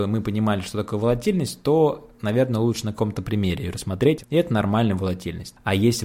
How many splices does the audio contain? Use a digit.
1